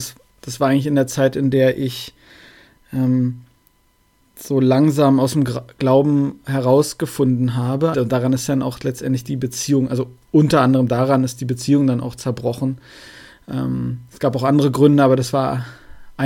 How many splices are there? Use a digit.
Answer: 1